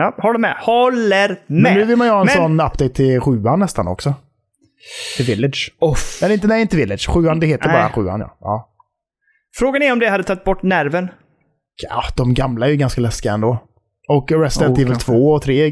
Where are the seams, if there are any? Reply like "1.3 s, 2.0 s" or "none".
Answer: none